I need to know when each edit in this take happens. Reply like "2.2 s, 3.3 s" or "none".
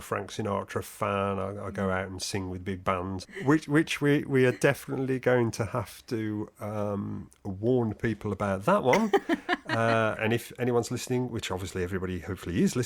3.2 s, 10.2 s